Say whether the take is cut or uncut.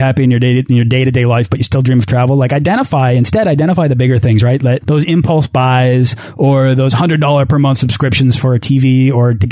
cut